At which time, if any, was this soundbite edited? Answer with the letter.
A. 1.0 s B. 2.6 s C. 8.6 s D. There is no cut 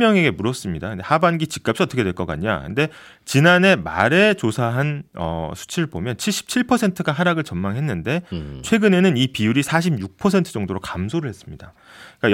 D